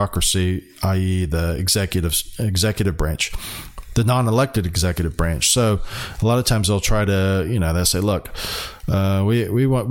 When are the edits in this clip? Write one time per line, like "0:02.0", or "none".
none